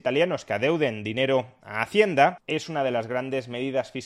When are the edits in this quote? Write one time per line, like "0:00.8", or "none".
0:02.4